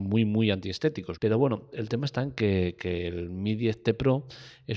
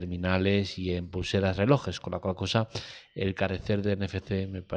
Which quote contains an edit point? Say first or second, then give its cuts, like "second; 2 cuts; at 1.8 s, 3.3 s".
first; 1 cut; at 1.2 s